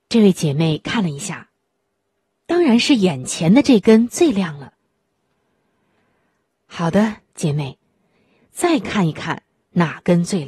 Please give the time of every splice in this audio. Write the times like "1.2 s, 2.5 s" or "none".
2.3 s, 8.4 s

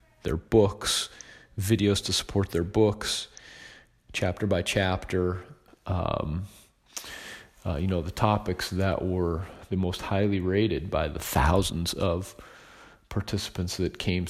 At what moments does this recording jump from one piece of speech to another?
5.7 s

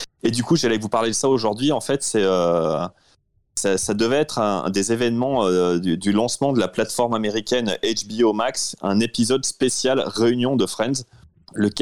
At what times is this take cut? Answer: none

